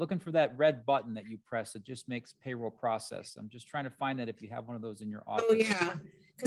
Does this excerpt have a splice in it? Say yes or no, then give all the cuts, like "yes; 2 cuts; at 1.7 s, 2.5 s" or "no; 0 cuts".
no; 0 cuts